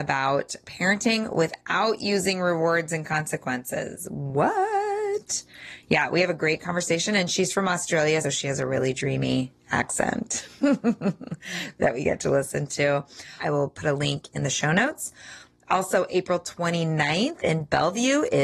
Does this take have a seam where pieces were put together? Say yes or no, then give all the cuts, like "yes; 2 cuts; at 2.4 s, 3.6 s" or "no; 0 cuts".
yes; 2 cuts; at 8.2 s, 13.4 s